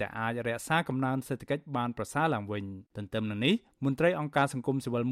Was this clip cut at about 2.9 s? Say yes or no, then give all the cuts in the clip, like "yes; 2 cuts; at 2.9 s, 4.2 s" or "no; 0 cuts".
yes; 1 cut; at 2.9 s